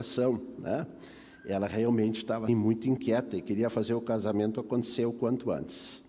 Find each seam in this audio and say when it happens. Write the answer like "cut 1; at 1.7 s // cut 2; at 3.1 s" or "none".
cut 1; at 2.5 s